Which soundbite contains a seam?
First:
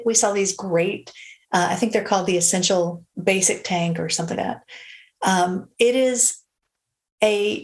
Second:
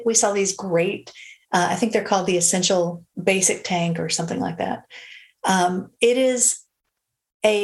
first; 1 cut; at 4.3 s

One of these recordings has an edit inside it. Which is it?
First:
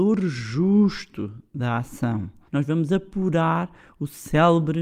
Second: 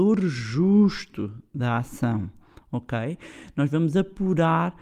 first; 1 cut; at 2.5 s

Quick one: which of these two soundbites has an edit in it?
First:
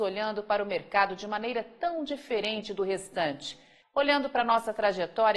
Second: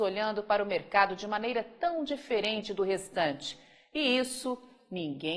first; 1 cut; at 3.8 s

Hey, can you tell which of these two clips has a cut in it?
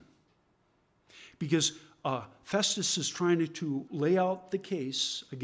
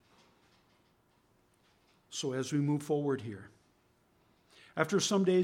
first; 1 cut; at 3.9 s

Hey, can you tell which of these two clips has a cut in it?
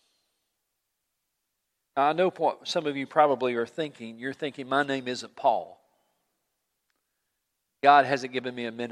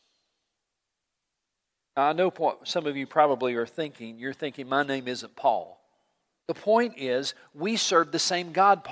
second; 1 cut; at 6.4 s

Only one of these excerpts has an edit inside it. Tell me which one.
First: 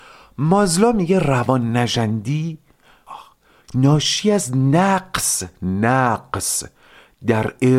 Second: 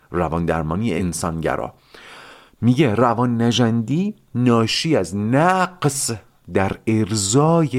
first; 1 cut; at 3.1 s

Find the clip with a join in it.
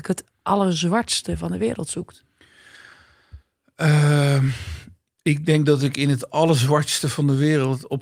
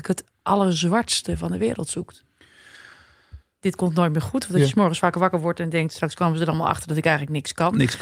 second; 1 cut; at 3.6 s

